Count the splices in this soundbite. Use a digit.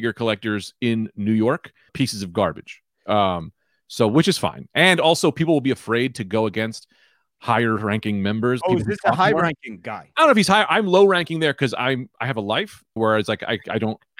3